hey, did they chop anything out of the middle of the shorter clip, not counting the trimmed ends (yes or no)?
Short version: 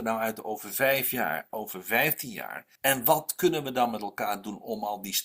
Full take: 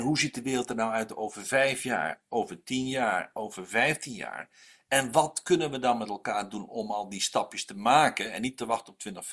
yes